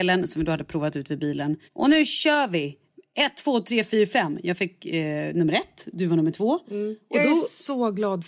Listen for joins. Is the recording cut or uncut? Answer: cut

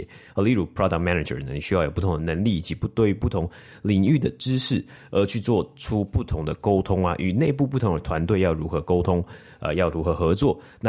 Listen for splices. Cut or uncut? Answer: uncut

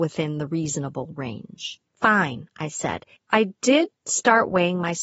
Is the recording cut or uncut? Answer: cut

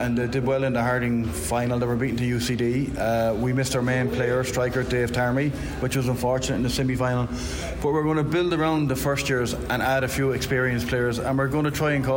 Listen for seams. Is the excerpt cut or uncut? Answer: uncut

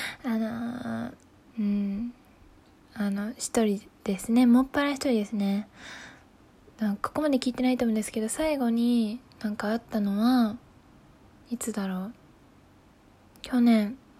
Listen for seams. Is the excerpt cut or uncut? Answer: cut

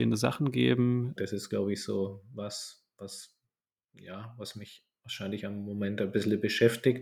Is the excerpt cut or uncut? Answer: cut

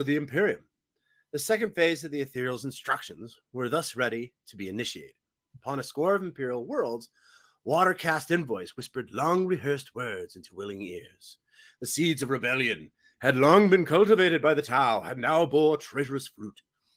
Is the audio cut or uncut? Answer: uncut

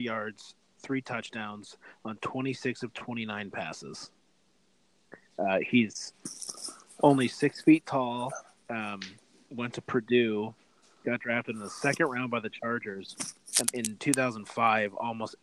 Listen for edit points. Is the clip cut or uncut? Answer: cut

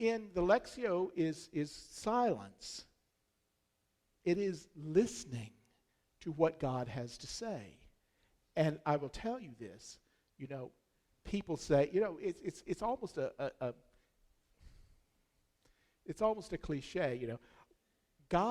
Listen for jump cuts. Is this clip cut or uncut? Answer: uncut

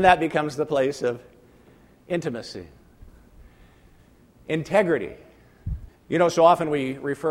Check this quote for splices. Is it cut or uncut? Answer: cut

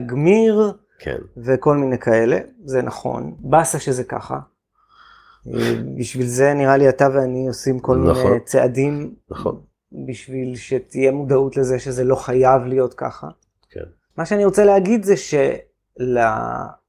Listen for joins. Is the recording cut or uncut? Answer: cut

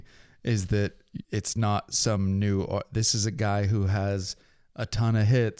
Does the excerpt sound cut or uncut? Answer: cut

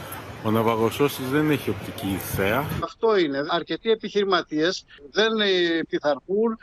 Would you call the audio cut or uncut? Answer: cut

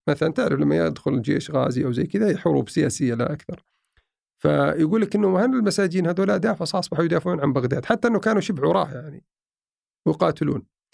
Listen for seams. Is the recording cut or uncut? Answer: uncut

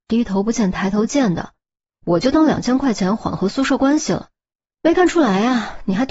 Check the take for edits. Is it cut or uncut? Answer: cut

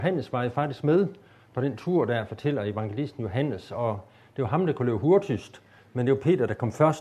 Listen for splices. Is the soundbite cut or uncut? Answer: uncut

